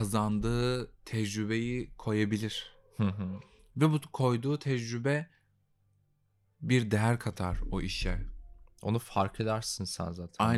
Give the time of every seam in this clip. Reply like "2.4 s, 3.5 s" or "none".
none